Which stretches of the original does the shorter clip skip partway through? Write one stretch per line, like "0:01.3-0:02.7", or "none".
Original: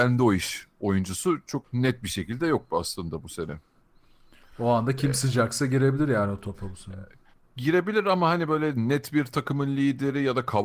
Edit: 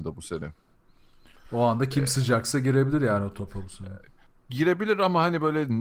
none

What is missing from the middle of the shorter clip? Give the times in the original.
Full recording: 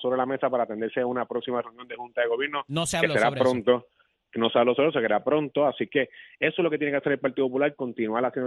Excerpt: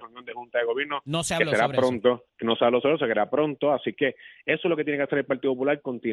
0:03.9-0:04.2

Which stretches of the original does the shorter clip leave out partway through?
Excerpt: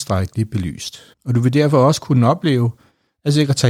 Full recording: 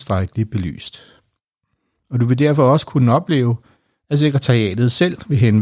0:01.1-0:02.0

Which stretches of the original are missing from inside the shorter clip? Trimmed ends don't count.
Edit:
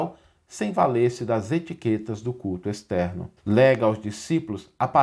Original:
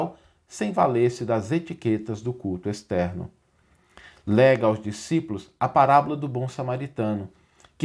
0:03.4-0:04.2

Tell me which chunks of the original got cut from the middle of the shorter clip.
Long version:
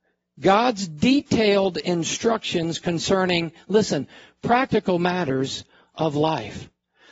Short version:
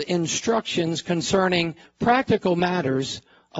0:03.6-0:04.3

